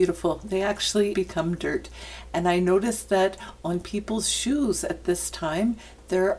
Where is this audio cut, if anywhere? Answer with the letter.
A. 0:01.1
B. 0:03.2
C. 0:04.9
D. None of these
A